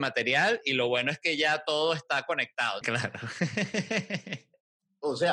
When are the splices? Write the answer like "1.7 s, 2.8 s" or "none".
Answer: 2.8 s